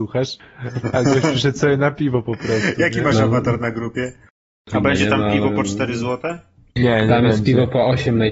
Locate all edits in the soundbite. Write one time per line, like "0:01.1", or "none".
none